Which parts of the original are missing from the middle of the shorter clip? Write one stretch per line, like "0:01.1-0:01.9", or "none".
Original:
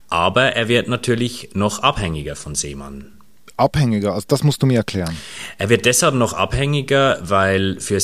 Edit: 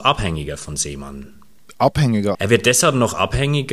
0:04.1-0:05.5